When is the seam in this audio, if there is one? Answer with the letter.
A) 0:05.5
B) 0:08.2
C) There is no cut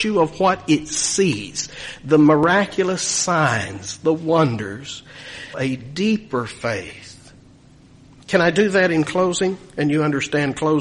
A